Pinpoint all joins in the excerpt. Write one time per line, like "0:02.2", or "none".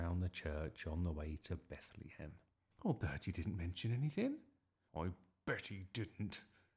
0:02.7
0:04.9